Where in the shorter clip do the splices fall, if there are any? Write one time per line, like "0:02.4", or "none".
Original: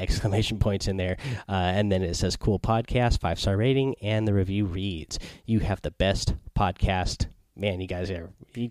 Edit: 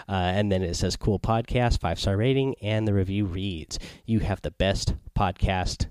none